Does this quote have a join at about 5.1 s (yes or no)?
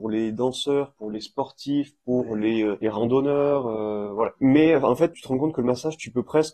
yes